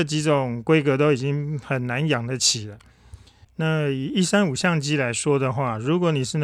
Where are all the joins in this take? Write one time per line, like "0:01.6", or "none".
0:03.5